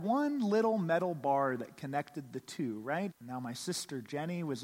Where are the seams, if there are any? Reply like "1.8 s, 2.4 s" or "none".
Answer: 3.1 s